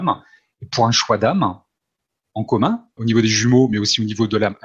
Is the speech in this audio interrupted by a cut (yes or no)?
yes